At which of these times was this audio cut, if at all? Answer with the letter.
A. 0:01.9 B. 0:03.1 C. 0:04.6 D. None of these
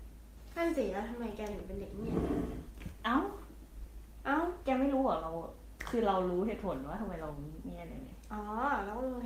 D